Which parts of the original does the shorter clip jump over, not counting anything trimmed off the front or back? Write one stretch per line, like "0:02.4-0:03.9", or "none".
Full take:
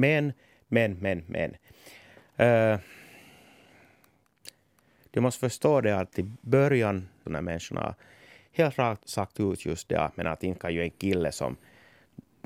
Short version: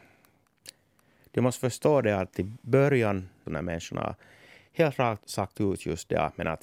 none